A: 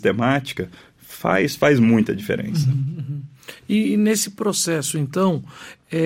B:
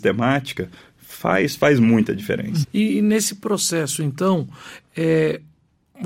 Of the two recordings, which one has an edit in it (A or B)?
B